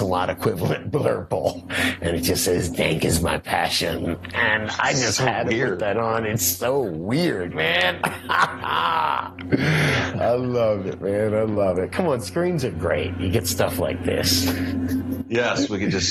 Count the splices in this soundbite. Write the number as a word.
one